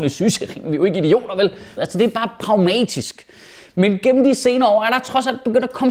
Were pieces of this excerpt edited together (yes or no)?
yes